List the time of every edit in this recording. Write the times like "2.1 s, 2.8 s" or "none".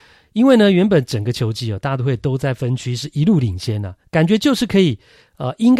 none